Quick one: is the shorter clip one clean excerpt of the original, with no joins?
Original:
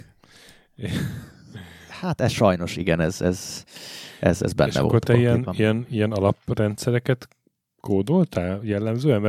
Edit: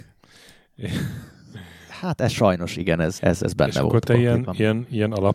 no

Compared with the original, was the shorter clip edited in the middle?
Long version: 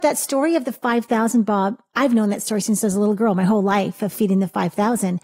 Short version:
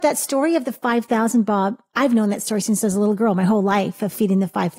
no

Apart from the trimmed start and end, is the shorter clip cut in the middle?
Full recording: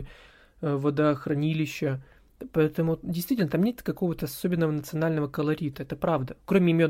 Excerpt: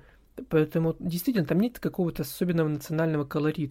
no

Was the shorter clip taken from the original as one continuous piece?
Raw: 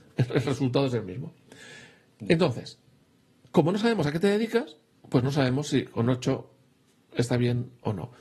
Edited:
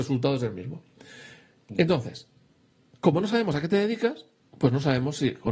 yes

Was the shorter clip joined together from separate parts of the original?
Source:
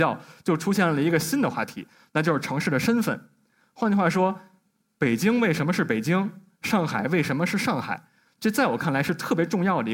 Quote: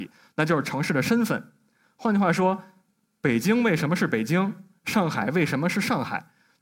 no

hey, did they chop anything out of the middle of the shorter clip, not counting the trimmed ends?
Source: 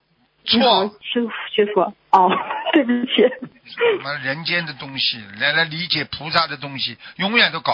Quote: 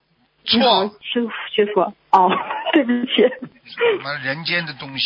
no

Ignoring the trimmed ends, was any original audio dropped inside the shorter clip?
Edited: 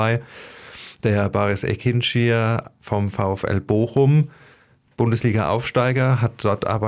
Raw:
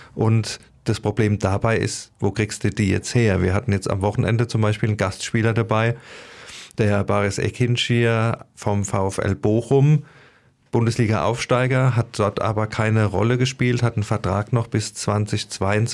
no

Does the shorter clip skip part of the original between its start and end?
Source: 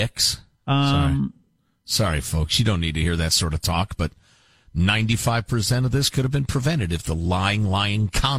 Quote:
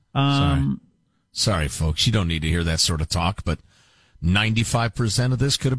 no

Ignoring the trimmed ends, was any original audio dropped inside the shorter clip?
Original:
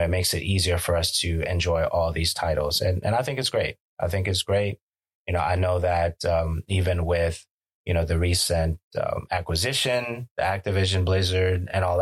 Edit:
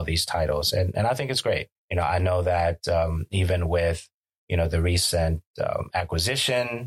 yes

